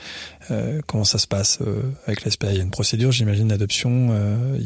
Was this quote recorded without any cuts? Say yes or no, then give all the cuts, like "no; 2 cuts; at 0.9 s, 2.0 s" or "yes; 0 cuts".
yes; 0 cuts